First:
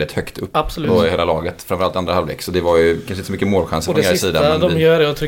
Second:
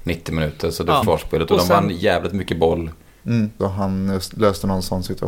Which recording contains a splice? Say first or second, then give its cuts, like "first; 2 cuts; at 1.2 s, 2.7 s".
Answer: second; 2 cuts; at 1.0 s, 3.6 s